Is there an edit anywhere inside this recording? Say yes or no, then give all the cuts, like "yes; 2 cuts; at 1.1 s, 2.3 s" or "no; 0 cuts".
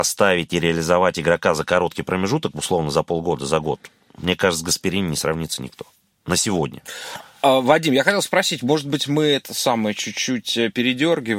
no; 0 cuts